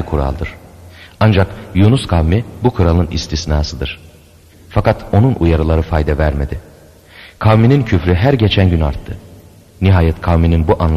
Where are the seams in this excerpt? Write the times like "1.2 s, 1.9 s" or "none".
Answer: 4.5 s